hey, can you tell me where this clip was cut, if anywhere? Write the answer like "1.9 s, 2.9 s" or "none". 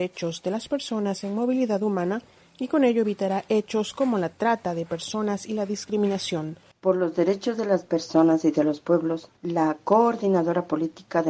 6.7 s, 9.4 s